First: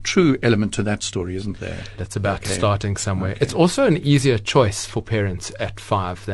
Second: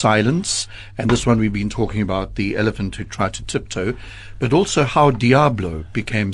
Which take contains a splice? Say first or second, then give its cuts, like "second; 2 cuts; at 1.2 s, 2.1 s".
first; 1 cut; at 2.0 s